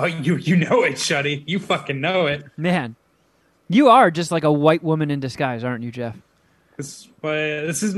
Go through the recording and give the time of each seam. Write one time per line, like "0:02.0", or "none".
0:06.6